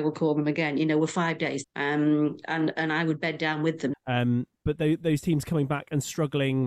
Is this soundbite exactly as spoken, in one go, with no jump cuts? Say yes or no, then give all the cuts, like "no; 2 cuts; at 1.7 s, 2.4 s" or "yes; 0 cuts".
no; 2 cuts; at 1.6 s, 3.9 s